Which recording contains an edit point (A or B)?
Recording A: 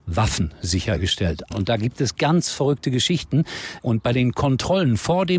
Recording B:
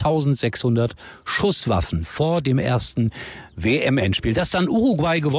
A